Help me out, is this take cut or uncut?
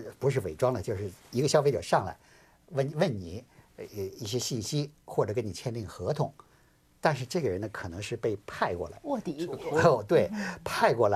uncut